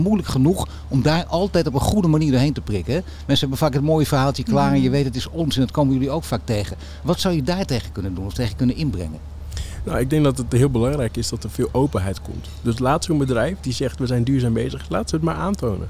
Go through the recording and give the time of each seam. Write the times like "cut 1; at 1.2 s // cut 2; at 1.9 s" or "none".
none